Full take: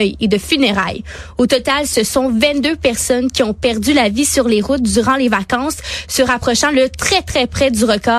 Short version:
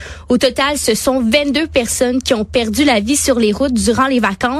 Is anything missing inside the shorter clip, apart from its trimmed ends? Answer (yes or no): no